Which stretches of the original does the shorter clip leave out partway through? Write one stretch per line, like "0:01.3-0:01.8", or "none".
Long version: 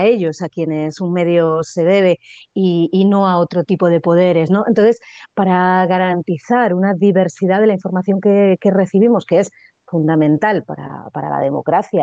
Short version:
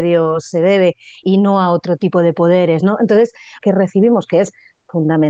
0:02.5-0:02.9
0:05.3-0:08.6